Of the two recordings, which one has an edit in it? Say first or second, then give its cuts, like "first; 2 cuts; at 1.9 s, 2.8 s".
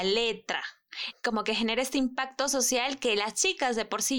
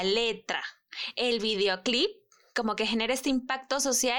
first; 1 cut; at 1.1 s